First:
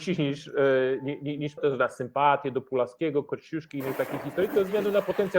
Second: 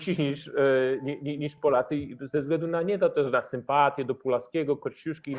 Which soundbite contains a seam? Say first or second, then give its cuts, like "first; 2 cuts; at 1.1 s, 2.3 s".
first; 1 cut; at 1.6 s